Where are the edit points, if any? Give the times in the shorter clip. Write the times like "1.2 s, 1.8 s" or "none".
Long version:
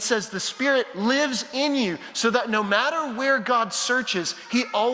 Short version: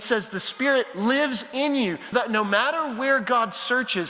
2.1 s

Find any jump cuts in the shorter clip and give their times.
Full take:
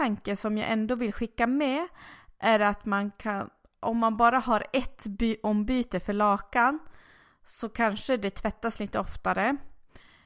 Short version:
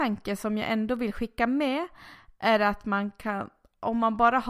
none

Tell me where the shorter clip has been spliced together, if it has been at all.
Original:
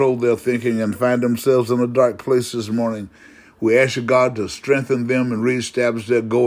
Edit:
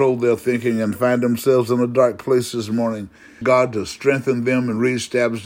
3.4 s

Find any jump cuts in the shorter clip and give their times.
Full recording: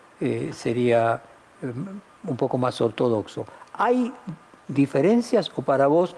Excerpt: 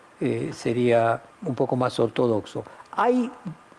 1.3 s

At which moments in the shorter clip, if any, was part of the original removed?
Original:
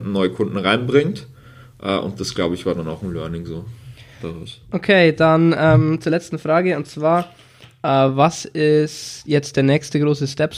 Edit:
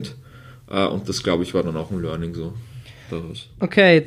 none

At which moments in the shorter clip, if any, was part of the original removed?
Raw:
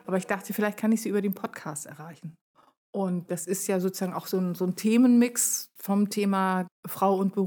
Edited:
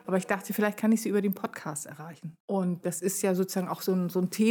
2.4 s

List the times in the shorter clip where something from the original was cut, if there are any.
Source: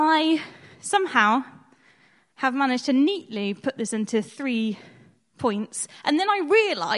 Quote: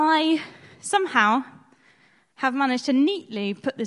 none

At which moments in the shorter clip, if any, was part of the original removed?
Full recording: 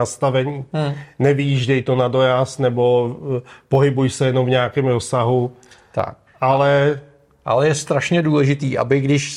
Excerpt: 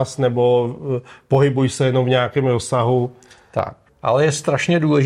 3.9 s

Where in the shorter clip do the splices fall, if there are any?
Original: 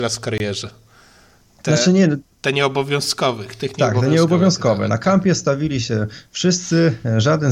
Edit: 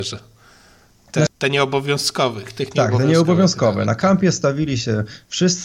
1.3 s

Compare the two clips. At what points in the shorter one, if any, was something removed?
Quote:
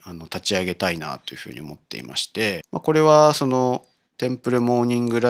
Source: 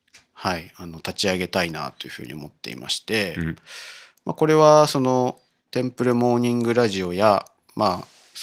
2.6 s

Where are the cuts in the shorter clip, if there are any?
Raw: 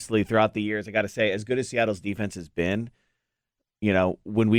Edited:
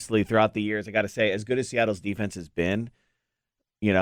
none

